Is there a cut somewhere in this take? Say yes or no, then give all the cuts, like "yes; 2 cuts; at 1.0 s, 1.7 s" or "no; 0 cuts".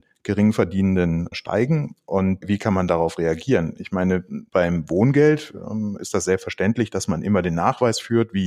no; 0 cuts